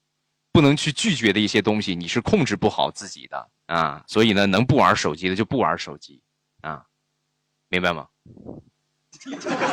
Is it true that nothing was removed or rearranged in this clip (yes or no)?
no